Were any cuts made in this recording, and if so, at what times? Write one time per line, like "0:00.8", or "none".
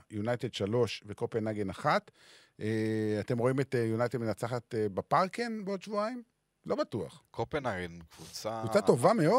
none